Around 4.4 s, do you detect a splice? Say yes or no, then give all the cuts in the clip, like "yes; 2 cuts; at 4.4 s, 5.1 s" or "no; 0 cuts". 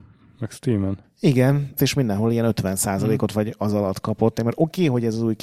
yes; 2 cuts; at 1.8 s, 4.4 s